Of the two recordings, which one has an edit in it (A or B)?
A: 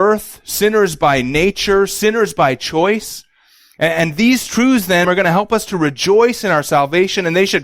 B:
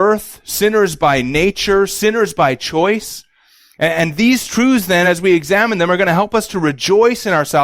A